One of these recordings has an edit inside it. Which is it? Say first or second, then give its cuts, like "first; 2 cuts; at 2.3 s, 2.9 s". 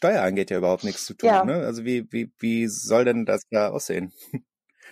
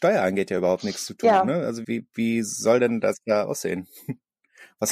second; 1 cut; at 1.8 s